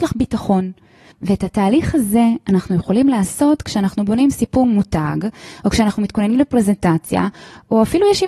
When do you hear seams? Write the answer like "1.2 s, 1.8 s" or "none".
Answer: 1.1 s